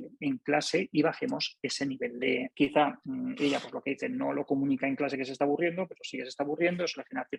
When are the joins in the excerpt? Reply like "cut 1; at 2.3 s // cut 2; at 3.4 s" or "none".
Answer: cut 1; at 2.5 s